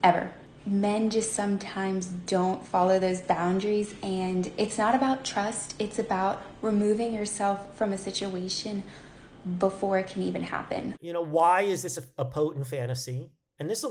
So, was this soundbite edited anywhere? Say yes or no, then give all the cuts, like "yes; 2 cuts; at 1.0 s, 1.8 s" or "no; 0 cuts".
no; 0 cuts